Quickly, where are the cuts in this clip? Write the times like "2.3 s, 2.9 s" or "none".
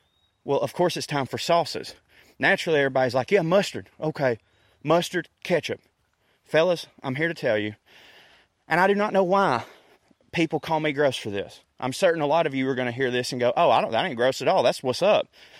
none